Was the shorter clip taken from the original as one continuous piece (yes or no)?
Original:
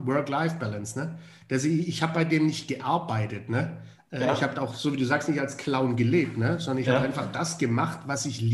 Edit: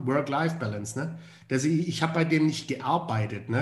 yes